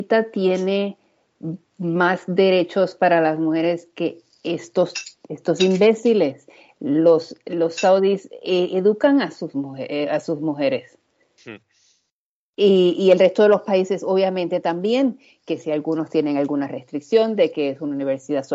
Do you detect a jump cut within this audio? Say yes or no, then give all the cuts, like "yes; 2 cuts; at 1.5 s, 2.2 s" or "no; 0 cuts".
no; 0 cuts